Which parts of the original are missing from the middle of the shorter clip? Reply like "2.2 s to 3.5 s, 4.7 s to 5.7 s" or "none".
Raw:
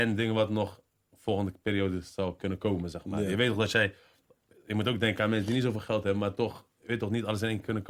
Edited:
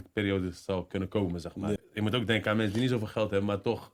3.3 s to 4.5 s